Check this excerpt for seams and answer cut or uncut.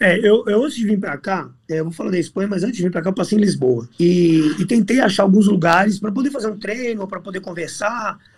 cut